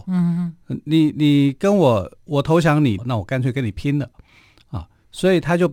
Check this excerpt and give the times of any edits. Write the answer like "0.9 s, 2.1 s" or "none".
3.0 s